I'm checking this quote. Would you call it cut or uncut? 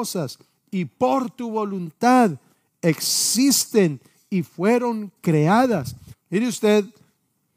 cut